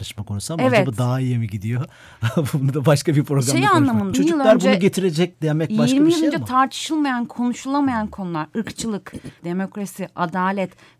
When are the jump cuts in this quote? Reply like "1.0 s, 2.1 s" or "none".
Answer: 4.1 s, 9.4 s